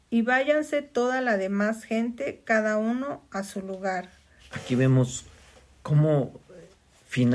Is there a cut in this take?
yes; 1 cut; at 4.4 s

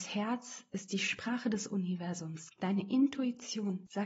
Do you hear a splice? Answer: yes; 1 cut; at 2.5 s

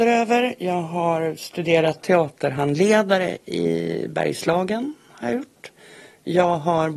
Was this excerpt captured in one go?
yes; 0 cuts

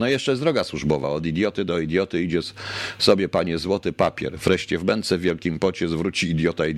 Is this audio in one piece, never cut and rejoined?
yes; 0 cuts

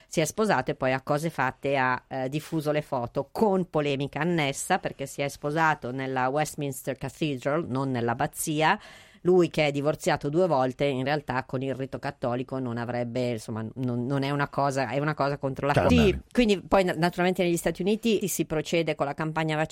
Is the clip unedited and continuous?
no; 2 cuts; at 15.9 s, 18.2 s

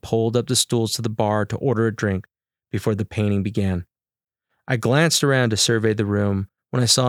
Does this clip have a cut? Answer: no; 0 cuts

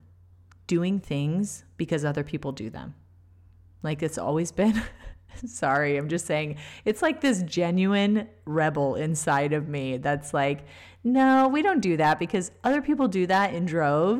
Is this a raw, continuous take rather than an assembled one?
yes; 0 cuts

